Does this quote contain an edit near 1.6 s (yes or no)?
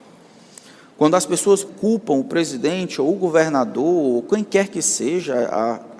yes